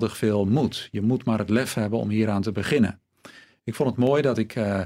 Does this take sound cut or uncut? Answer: uncut